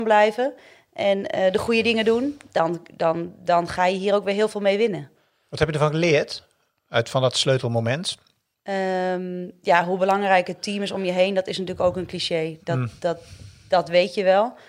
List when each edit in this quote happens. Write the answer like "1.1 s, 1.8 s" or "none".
none